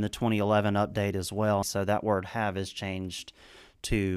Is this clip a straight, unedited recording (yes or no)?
no